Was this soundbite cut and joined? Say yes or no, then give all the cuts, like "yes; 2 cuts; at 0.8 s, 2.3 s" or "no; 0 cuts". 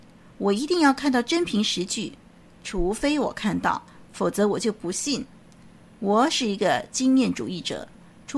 no; 0 cuts